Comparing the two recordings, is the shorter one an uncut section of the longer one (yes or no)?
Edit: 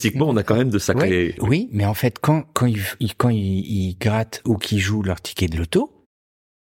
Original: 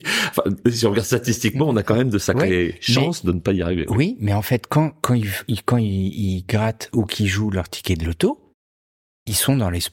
no